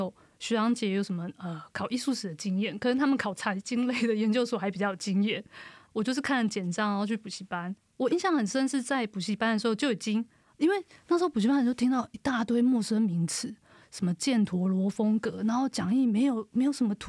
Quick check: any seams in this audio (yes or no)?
no